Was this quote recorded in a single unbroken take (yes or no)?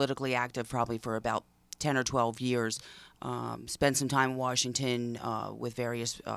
yes